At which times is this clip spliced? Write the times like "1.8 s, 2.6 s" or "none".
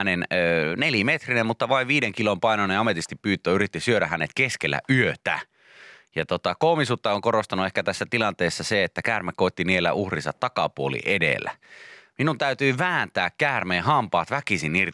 none